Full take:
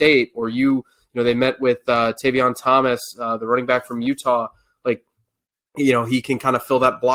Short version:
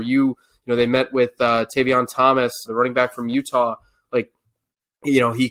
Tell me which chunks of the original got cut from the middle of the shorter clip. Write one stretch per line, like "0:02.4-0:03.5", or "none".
0:03.1-0:03.4